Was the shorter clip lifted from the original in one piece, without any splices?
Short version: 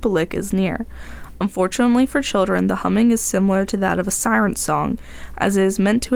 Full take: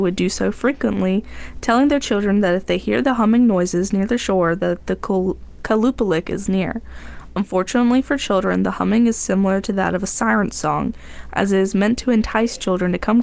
yes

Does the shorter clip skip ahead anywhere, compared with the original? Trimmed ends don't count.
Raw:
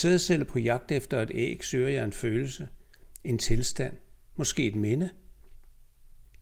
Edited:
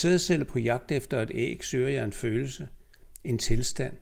no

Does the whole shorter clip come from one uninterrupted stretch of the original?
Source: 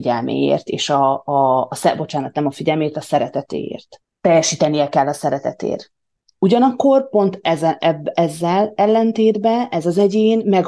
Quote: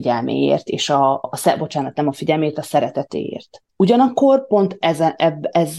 no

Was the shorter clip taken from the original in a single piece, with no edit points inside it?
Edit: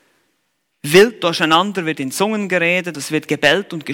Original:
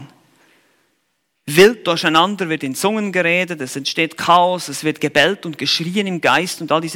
no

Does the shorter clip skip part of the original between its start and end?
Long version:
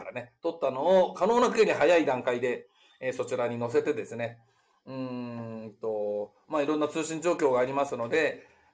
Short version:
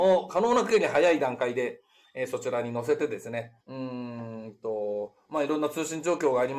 yes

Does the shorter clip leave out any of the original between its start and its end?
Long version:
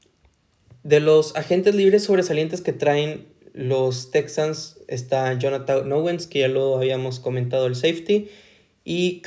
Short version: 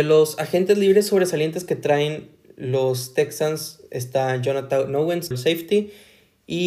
yes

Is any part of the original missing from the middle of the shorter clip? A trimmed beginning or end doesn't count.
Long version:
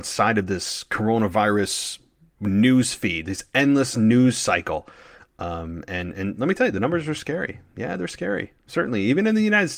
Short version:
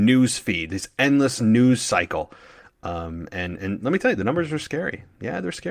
no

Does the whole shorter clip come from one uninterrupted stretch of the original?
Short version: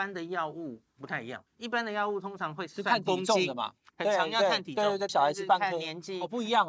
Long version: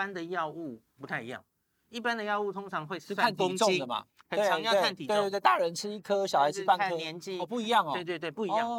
no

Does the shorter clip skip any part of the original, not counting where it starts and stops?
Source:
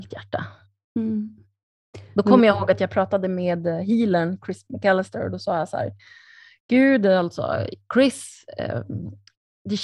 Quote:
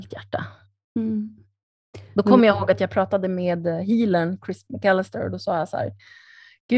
no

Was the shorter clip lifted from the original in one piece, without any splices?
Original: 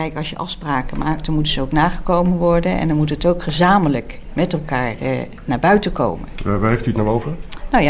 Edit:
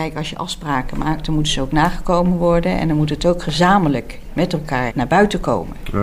no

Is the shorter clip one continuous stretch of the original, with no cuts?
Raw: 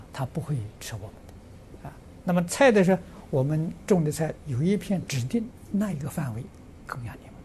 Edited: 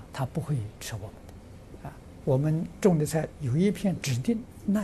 no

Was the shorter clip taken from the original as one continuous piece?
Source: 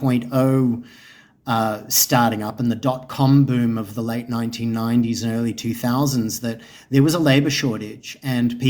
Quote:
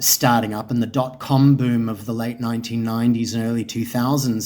yes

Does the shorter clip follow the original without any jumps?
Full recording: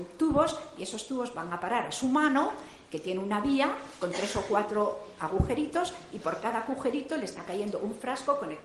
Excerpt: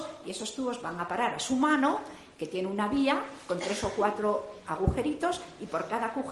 yes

